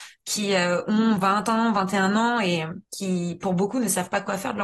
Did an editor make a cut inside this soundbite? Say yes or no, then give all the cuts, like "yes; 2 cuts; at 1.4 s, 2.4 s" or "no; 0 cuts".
yes; 1 cut; at 2.9 s